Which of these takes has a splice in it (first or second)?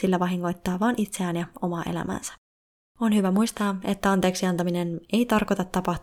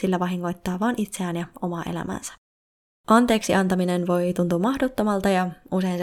first